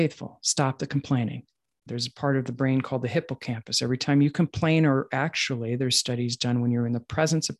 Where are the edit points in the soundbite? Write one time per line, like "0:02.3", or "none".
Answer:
0:01.9